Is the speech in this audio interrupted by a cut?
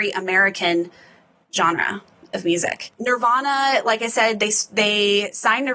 no; 0 cuts

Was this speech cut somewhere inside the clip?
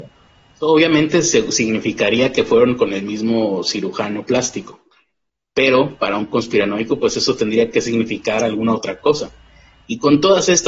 no; 0 cuts

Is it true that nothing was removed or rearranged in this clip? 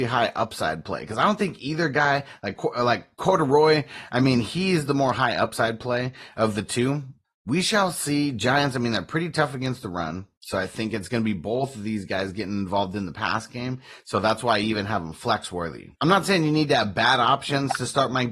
no; 2 cuts; at 7.2 s, 15.9 s

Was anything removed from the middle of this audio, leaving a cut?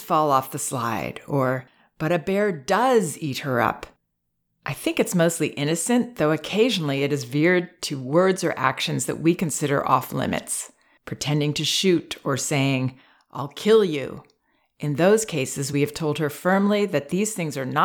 no; 0 cuts

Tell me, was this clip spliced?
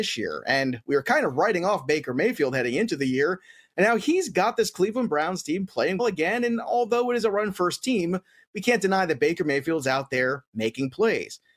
yes; 1 cut; at 6.0 s

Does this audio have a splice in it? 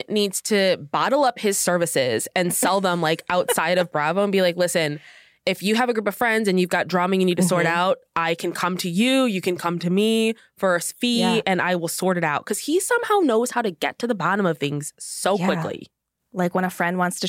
no; 0 cuts

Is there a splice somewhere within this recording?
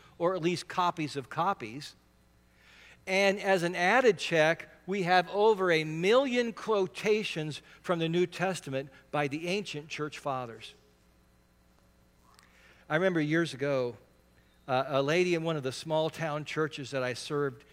no; 0 cuts

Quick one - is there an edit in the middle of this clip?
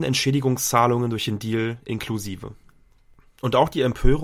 no; 0 cuts

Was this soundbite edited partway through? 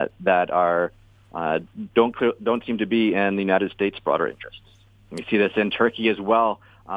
no; 0 cuts

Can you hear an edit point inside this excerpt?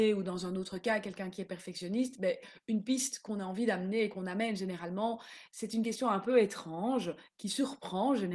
no; 0 cuts

